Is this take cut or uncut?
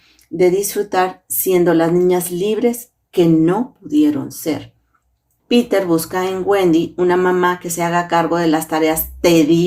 cut